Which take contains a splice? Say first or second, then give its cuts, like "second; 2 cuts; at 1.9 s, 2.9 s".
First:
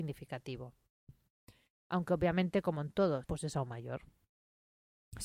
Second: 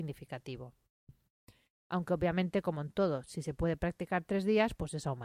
first; 1 cut; at 3.2 s